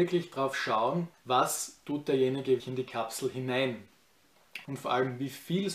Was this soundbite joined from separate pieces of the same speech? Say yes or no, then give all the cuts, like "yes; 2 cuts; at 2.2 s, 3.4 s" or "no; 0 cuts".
yes; 3 cuts; at 1.1 s, 2.6 s, 4.6 s